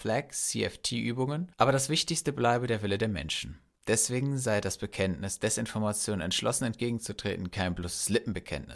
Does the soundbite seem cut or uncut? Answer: cut